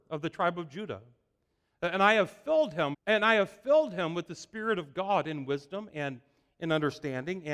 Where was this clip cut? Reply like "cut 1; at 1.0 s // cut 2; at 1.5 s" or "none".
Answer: cut 1; at 2.9 s